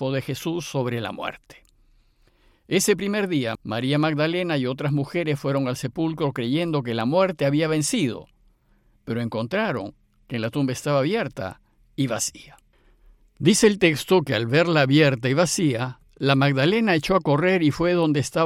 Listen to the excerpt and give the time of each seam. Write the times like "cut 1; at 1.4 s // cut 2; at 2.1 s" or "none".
cut 1; at 3.6 s